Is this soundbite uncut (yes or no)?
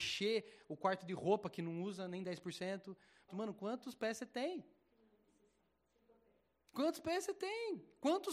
no